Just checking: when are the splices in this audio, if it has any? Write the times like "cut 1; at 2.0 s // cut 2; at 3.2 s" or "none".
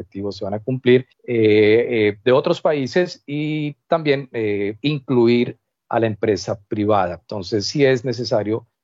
cut 1; at 1.1 s